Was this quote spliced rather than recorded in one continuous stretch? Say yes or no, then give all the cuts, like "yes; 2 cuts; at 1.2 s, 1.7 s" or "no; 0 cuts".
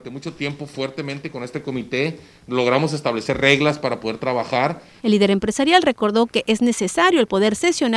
yes; 1 cut; at 5.0 s